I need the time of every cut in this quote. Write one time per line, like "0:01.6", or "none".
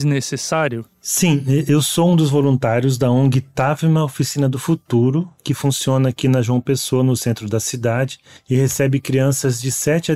none

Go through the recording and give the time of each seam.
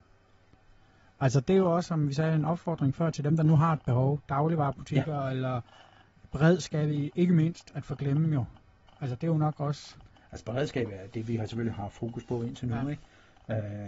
none

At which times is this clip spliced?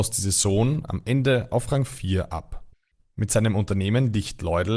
0:03.0

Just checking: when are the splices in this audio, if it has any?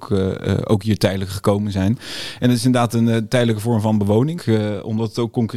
0:04.4

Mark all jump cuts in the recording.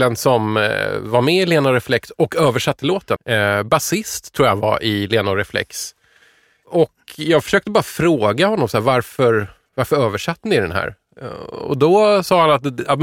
0:03.2

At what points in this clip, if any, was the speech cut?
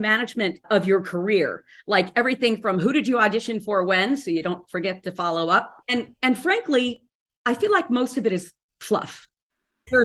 0:05.8

